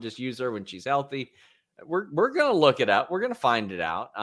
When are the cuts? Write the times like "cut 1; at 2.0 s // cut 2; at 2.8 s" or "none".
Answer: none